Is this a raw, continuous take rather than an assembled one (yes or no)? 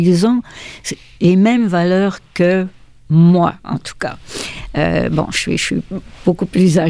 yes